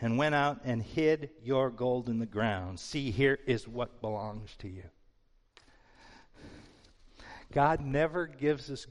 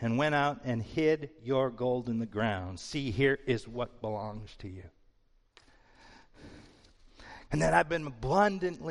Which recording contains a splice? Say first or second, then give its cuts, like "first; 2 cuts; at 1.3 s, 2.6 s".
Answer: second; 1 cut; at 7.5 s